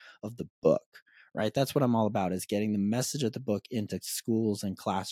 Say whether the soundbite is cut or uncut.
uncut